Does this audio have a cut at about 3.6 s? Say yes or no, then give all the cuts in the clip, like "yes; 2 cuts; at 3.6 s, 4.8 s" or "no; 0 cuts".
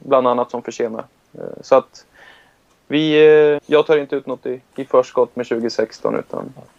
yes; 2 cuts; at 3.6 s, 4.7 s